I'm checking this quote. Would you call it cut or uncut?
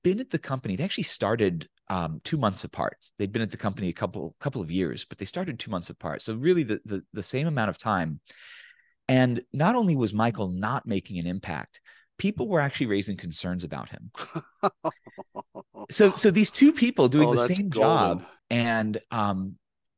cut